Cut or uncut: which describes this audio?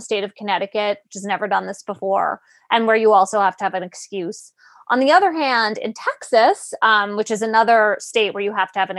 uncut